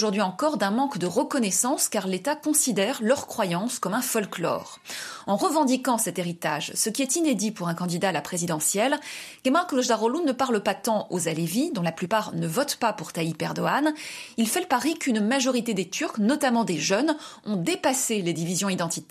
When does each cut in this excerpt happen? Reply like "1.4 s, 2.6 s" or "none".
none